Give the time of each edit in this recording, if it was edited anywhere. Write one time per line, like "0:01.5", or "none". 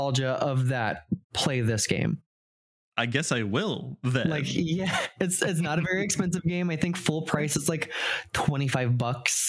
none